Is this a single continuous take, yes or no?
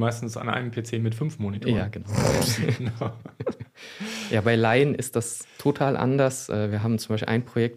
yes